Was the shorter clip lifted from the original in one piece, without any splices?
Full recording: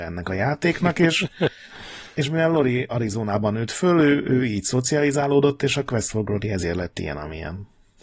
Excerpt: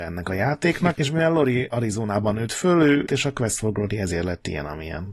no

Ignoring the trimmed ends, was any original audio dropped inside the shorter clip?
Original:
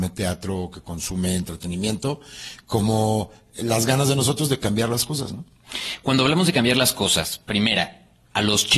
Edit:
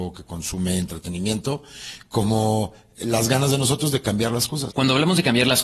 yes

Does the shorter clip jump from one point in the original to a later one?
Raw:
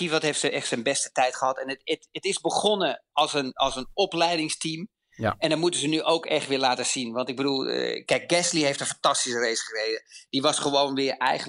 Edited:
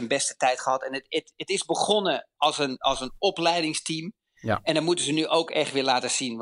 no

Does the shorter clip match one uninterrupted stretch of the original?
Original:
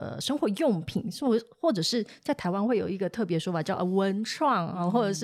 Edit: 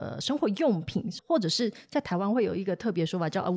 no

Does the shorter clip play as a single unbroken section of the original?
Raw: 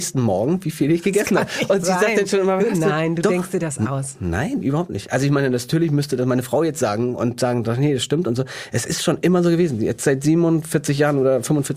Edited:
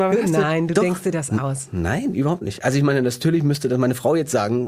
yes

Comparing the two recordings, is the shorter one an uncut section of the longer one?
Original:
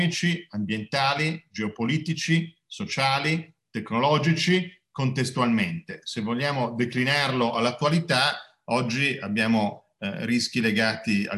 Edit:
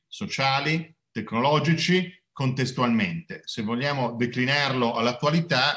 yes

